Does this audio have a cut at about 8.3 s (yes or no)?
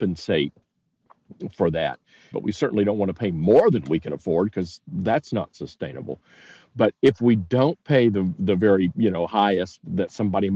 no